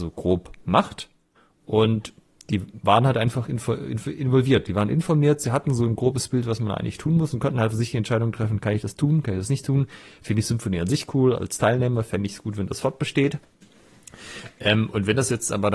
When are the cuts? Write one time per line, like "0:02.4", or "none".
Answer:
none